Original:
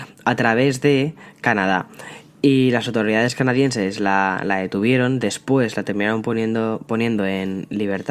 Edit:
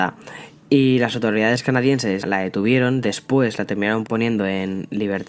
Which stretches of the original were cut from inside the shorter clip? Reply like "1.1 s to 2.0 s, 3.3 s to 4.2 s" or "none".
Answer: 3.9 s to 4.4 s, 6.2 s to 6.8 s